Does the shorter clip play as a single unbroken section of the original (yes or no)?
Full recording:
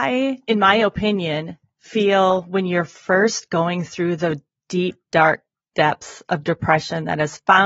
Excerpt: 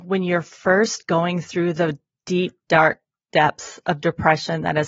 yes